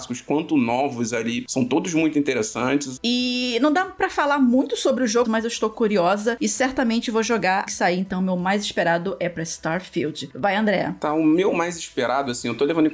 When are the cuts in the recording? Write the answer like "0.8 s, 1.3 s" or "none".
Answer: 3.0 s, 5.2 s, 7.7 s

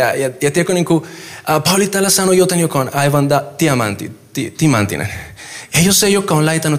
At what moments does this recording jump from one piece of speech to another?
5.7 s

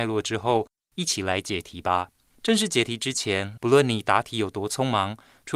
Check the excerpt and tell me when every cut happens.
3.6 s

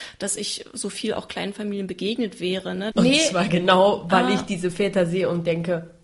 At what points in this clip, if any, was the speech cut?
2.9 s

